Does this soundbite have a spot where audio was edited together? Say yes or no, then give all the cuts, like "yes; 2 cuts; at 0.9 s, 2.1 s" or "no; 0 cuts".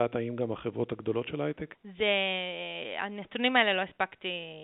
yes; 1 cut; at 1.7 s